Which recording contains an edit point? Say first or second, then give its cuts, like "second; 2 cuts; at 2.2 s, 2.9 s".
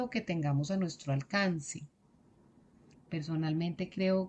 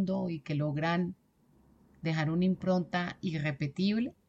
first; 1 cut; at 2.9 s